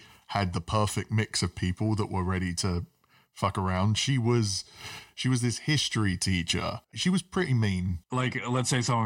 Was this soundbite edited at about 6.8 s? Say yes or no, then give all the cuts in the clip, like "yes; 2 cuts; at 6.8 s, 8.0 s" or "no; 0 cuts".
yes; 2 cuts; at 6.8 s, 8.0 s